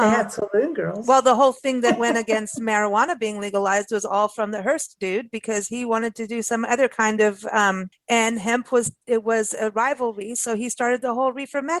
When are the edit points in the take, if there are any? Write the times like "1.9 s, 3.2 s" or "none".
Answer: 7.9 s